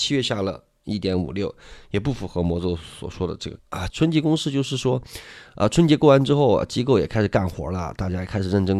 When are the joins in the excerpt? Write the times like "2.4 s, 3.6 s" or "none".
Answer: 3.9 s